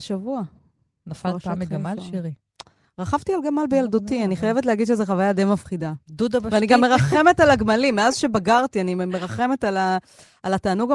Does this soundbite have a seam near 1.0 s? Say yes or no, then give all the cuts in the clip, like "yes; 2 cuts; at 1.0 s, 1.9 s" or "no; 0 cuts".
no; 0 cuts